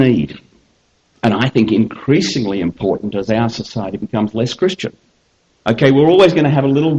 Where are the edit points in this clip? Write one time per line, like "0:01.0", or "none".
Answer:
0:05.5